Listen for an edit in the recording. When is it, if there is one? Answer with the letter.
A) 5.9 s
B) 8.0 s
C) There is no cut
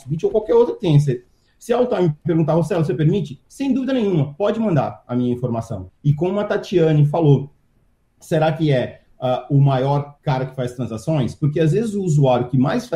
A